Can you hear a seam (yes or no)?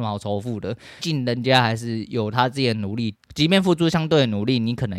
yes